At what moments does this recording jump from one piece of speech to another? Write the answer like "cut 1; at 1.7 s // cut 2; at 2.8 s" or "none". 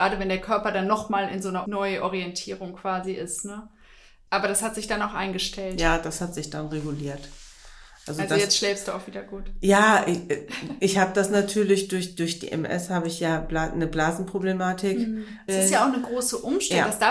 cut 1; at 15.5 s

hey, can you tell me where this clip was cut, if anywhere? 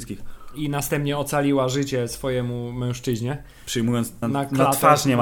cut 1; at 4.2 s

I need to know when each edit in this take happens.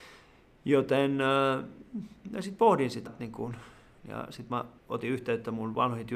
cut 1; at 3.1 s // cut 2; at 4.8 s

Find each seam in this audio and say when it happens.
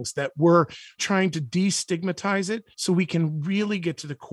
cut 1; at 1.0 s // cut 2; at 2.7 s

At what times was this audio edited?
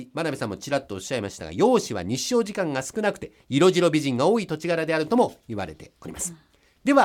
none

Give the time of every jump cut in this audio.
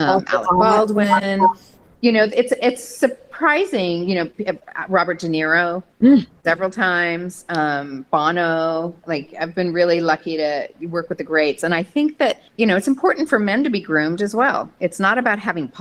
cut 1; at 12.5 s

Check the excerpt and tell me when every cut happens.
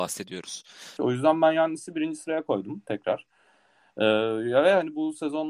cut 1; at 1.0 s

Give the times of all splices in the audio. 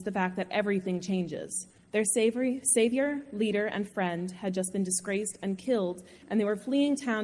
cut 1; at 1.8 s

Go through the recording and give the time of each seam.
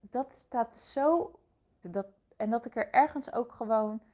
cut 1; at 1.8 s

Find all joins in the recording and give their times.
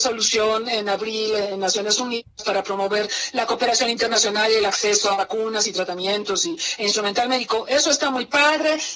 none

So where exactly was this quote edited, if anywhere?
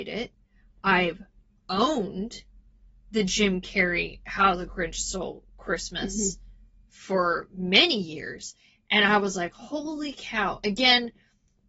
none

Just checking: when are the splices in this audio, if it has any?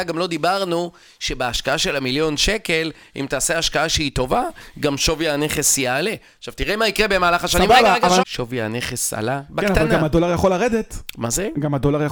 cut 1; at 8.2 s

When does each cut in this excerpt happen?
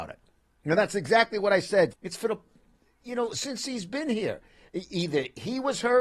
cut 1; at 1.9 s

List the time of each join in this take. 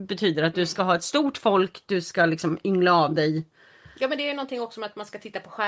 none

